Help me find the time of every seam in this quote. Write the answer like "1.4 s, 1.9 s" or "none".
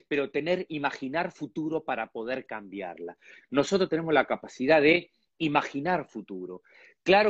3.4 s